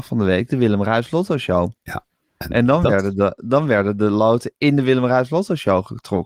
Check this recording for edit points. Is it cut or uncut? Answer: cut